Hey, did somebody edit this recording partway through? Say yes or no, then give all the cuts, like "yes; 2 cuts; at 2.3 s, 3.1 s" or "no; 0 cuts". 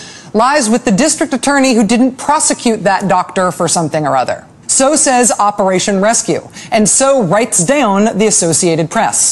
yes; 1 cut; at 4.6 s